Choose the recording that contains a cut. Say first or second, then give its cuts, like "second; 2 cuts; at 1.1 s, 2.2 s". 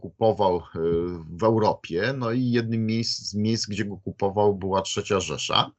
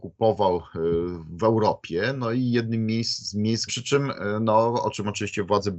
second; 1 cut; at 3.7 s